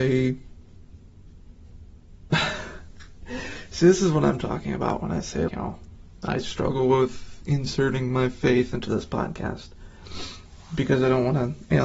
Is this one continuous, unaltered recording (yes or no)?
no